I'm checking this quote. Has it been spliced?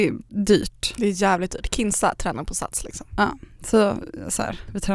no; 0 cuts

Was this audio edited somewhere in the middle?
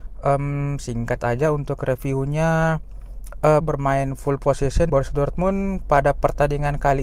yes; 2 cuts; at 3.6 s, 4.9 s

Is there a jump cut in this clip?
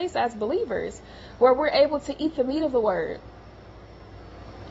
no; 0 cuts

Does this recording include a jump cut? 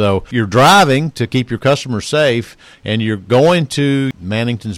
no; 0 cuts

